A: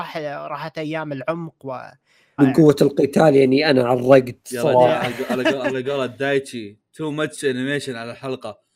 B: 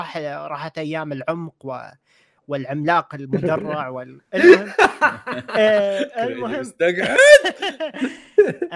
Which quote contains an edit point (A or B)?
A